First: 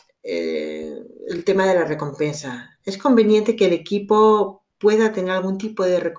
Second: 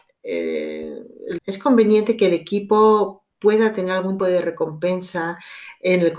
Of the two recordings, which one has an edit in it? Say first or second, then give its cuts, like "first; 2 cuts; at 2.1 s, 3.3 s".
second; 2 cuts; at 1.4 s, 4.2 s